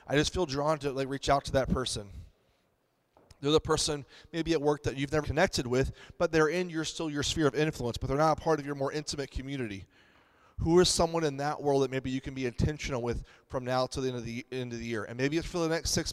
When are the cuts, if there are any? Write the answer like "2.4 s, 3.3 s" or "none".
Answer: 5.2 s